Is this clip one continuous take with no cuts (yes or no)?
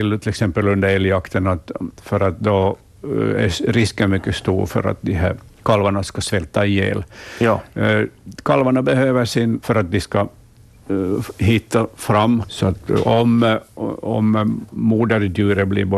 no